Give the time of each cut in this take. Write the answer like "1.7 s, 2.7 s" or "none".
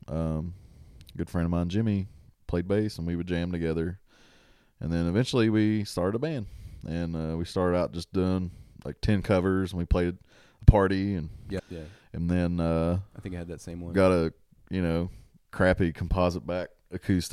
11.6 s